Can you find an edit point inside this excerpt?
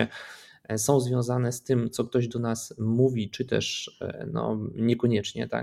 no; 0 cuts

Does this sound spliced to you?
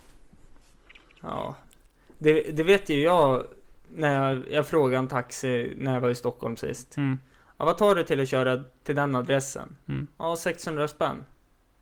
no; 0 cuts

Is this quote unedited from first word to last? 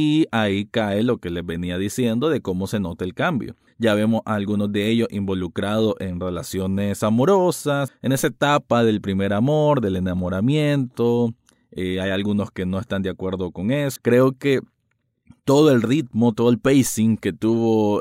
no; 2 cuts; at 7.9 s, 14.0 s

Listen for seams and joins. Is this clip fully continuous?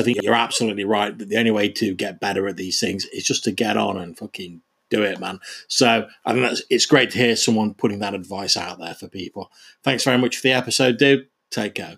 yes; 0 cuts

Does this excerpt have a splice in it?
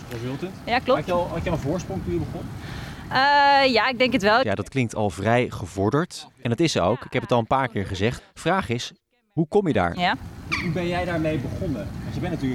yes; 3 cuts; at 4.4 s, 8.2 s, 10.0 s

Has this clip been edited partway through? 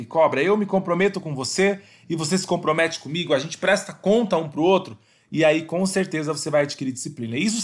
no; 0 cuts

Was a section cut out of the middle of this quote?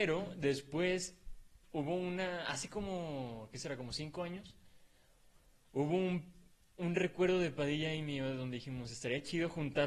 no; 0 cuts

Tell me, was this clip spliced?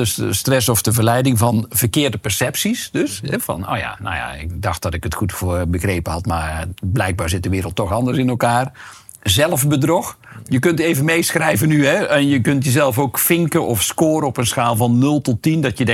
no; 0 cuts

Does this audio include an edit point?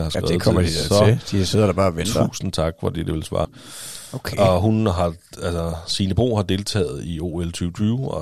yes; 1 cut; at 3.4 s

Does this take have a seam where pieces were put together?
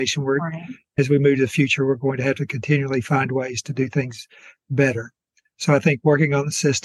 no; 0 cuts

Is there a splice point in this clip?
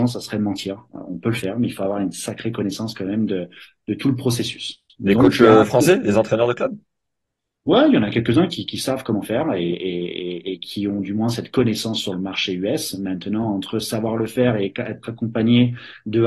no; 0 cuts

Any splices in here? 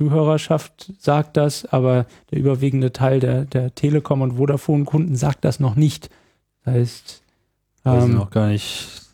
no; 0 cuts

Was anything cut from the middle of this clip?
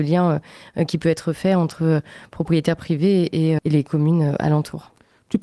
yes; 1 cut; at 3.6 s

